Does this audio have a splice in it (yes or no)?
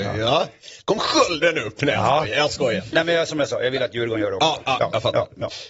no